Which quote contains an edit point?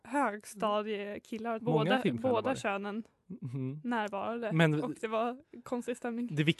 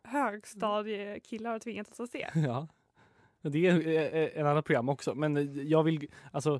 first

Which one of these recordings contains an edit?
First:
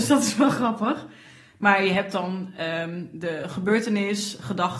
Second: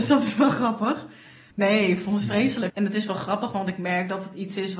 second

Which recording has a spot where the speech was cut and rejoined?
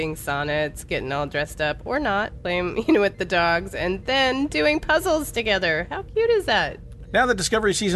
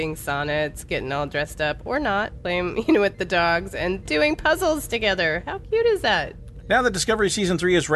second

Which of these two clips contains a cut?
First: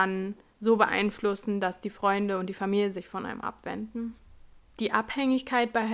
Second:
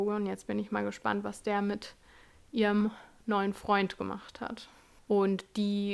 second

